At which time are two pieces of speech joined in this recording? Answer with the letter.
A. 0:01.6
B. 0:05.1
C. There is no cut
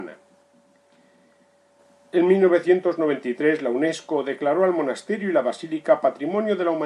C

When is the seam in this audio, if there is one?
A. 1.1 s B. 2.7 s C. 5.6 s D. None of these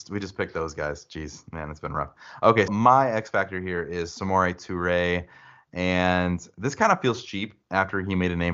B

